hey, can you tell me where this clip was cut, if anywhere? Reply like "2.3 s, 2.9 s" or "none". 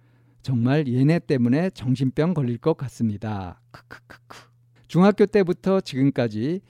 4.8 s